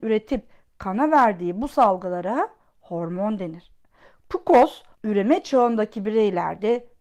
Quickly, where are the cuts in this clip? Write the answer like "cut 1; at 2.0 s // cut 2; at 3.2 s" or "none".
cut 1; at 4.9 s